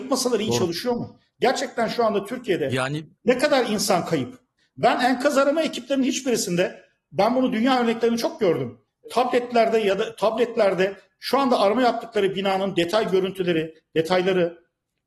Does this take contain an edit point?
no; 0 cuts

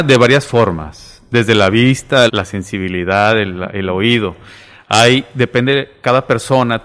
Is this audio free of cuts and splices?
no; 1 cut; at 2.3 s

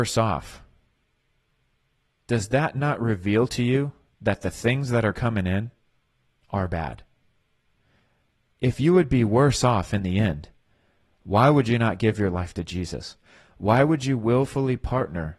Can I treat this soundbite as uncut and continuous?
yes; 0 cuts

